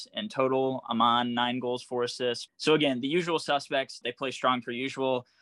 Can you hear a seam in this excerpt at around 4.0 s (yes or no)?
yes